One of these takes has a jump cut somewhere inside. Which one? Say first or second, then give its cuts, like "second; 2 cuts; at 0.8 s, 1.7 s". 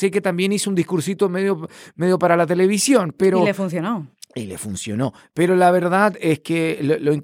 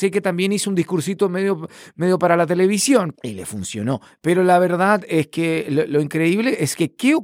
second; 1 cut; at 3.1 s